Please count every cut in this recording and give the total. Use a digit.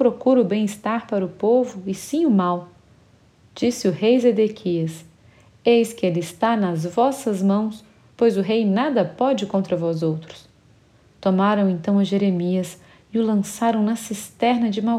0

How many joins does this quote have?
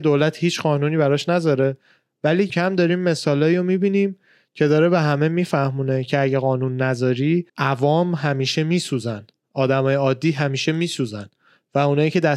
2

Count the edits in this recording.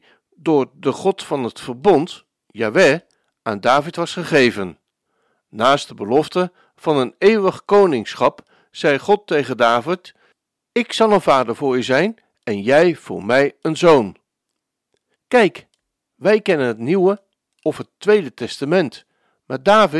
1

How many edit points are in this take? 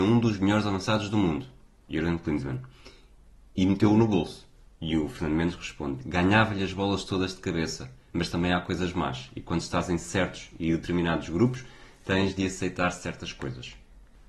1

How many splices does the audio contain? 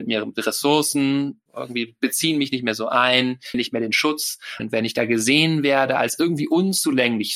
3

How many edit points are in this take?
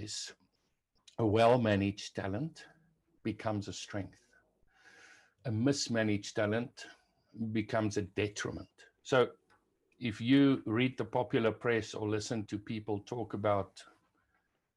2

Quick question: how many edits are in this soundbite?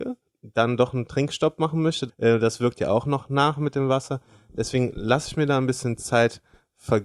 1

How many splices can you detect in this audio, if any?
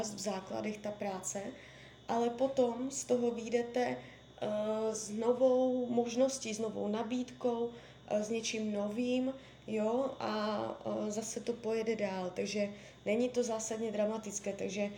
0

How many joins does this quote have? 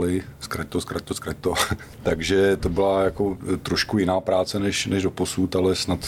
0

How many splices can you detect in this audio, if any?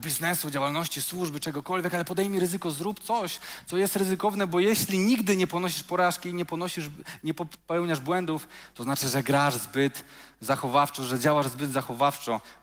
0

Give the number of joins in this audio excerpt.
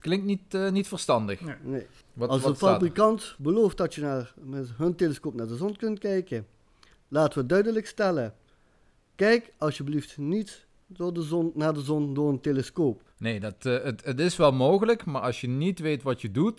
0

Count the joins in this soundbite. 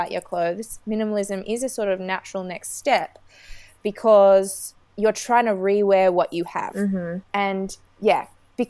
2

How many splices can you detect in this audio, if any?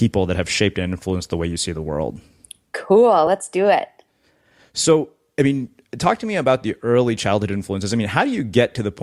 0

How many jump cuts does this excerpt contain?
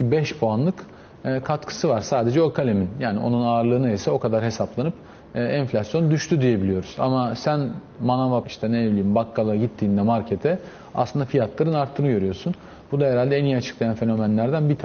1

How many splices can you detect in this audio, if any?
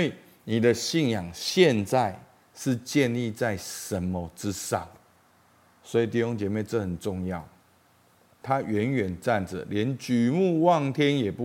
1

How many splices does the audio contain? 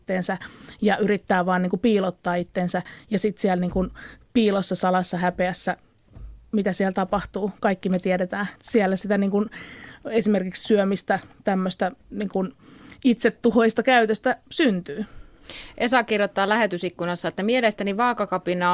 1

